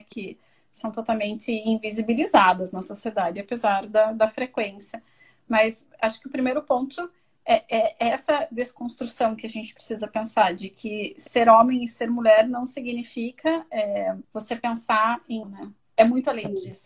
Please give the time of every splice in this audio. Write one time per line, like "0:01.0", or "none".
0:14.2
0:15.4